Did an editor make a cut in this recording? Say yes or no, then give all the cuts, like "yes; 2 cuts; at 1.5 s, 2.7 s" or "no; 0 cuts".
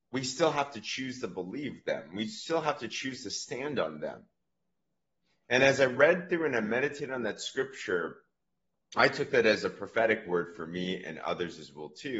no; 0 cuts